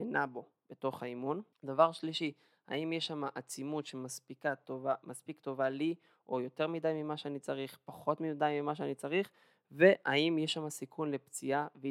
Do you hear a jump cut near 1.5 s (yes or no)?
yes